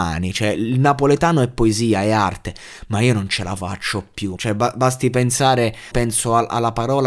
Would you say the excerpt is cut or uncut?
cut